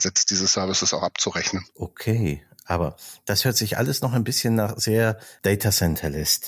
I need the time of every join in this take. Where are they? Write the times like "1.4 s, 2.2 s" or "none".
1.7 s